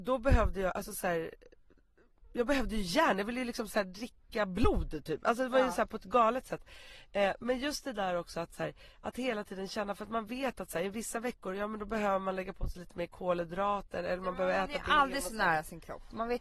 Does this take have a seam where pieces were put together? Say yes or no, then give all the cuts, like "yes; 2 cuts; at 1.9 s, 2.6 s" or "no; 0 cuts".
no; 0 cuts